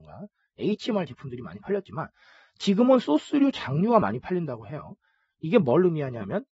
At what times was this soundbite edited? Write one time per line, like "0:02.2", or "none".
none

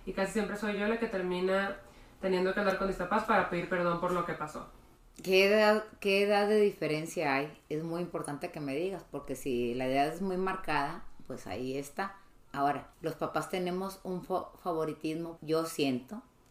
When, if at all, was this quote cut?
0:12.9
0:15.4

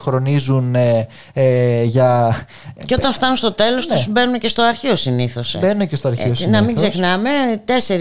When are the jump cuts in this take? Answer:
none

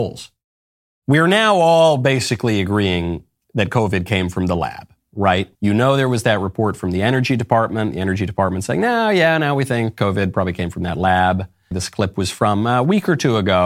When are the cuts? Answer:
0:05.6
0:11.7

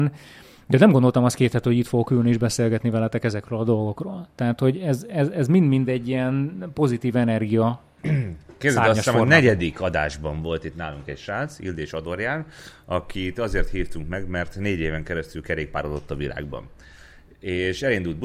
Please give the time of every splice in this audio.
none

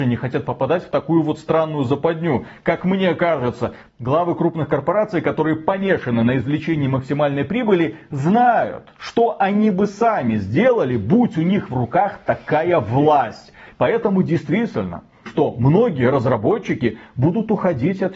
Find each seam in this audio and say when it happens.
0:13.7
0:15.3

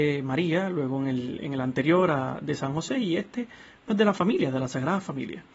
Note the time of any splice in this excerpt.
none

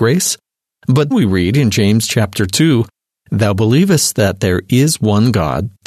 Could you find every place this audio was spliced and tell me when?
0:01.1

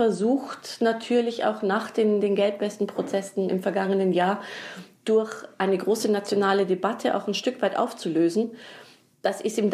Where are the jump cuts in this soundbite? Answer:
none

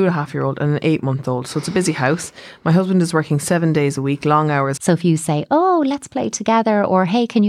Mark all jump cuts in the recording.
0:04.8

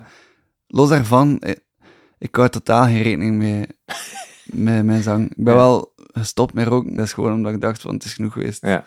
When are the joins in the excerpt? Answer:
0:07.0

